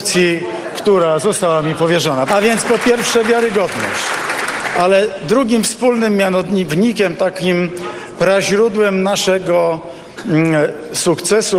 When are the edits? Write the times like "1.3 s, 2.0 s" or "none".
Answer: 2.3 s